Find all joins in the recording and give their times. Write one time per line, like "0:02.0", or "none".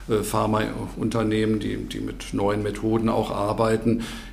none